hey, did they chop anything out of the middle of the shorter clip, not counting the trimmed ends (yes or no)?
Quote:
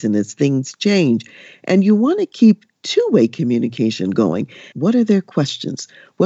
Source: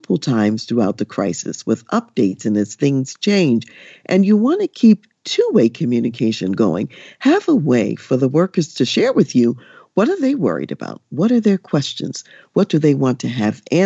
yes